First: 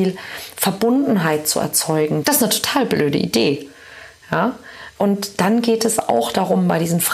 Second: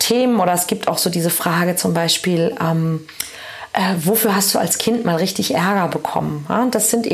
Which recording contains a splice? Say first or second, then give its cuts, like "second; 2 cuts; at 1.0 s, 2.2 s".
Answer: first; 2 cuts; at 2.2 s, 5.0 s